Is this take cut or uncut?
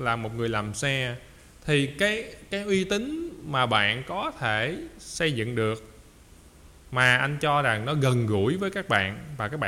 uncut